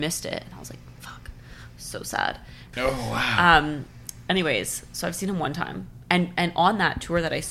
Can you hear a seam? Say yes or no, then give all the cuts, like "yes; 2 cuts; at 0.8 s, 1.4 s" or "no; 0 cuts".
yes; 1 cut; at 2.7 s